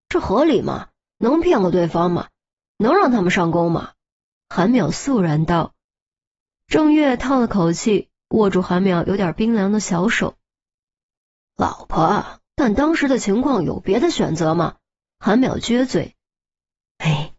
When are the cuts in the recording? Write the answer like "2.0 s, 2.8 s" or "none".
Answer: 4.4 s, 12.5 s, 15.1 s

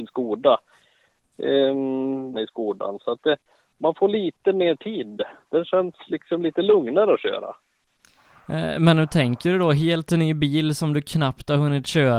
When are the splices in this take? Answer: 2.3 s

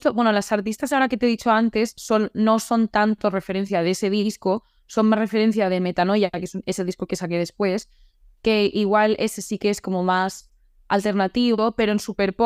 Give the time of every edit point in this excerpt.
none

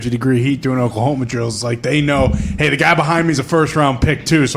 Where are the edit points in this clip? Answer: none

